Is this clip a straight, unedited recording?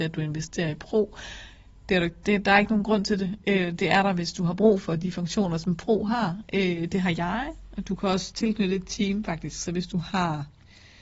yes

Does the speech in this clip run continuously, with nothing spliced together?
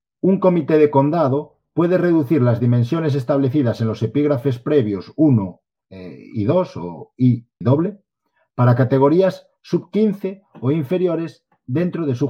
no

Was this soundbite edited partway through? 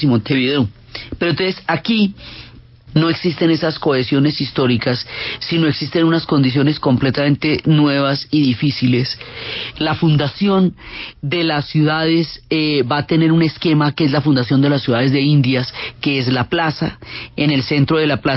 yes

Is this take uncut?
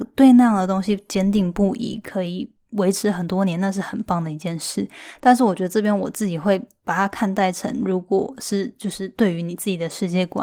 yes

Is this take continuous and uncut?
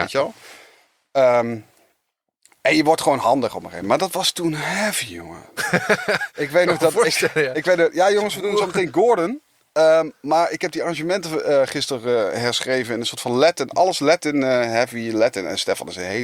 yes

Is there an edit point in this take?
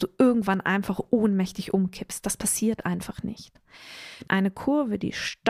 yes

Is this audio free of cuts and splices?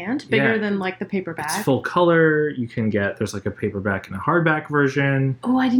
yes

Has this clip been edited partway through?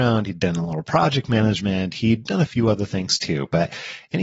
no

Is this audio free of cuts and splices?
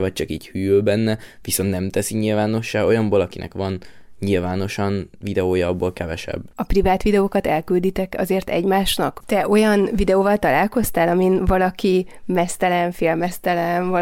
no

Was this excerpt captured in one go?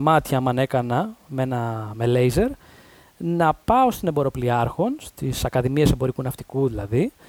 yes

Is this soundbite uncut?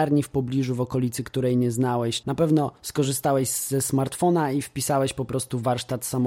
no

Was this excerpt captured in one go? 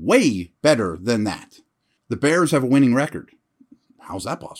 no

